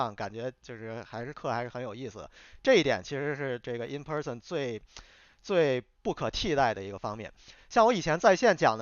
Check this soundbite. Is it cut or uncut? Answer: uncut